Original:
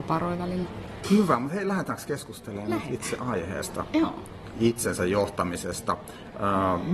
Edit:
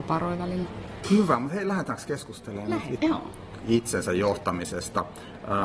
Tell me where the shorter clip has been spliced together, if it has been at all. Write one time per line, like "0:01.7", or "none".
0:03.0